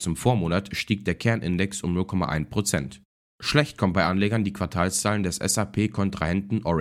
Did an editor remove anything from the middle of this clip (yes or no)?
yes